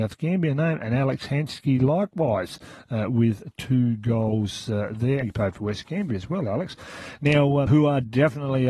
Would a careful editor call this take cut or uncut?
cut